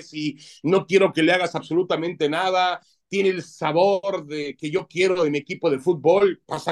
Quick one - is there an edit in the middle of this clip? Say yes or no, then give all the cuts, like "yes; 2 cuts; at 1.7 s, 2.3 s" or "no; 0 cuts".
no; 0 cuts